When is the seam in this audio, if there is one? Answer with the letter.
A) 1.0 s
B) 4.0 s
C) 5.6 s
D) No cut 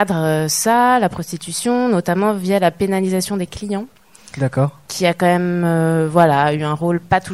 D